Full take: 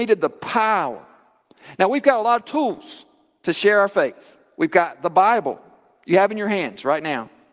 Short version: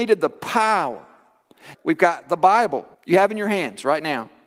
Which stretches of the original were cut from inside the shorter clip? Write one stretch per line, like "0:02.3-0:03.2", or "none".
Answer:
0:01.7-0:04.5
0:05.7-0:05.9